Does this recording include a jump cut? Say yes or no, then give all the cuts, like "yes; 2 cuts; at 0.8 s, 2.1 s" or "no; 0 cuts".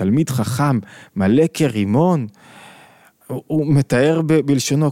no; 0 cuts